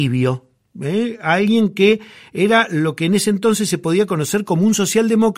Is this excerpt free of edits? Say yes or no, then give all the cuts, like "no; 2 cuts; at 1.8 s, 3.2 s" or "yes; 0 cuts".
yes; 0 cuts